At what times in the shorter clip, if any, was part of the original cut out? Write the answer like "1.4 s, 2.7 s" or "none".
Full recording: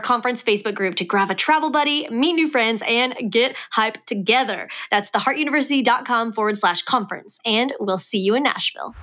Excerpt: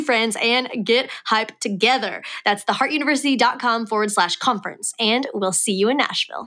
none